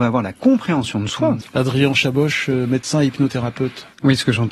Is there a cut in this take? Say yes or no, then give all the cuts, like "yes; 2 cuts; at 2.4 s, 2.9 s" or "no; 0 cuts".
yes; 1 cut; at 1.4 s